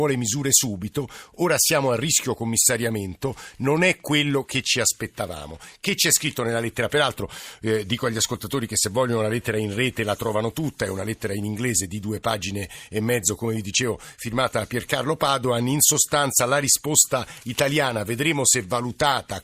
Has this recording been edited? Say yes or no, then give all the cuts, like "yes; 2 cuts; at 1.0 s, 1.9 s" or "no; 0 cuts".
no; 0 cuts